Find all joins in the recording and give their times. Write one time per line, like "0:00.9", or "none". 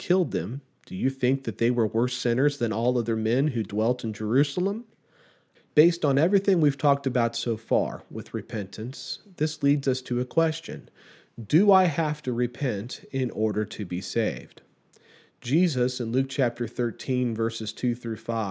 0:05.5